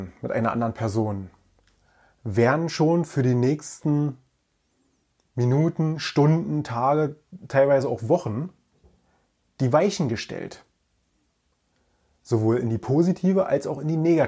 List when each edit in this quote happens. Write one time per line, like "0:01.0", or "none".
none